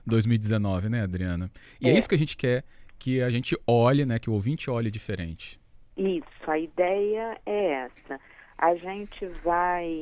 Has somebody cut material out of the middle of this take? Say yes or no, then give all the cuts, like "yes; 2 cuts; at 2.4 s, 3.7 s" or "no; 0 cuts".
no; 0 cuts